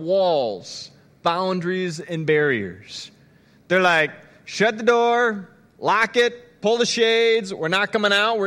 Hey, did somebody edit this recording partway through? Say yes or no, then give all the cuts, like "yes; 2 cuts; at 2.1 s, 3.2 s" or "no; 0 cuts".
no; 0 cuts